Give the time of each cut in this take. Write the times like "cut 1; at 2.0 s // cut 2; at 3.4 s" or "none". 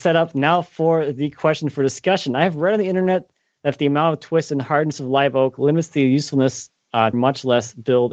cut 1; at 7.1 s

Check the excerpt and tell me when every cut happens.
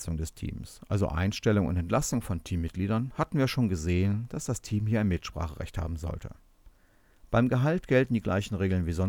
none

